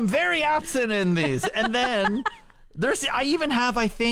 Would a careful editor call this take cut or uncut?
uncut